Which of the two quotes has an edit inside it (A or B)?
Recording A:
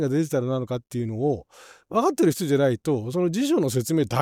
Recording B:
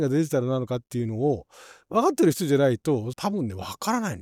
B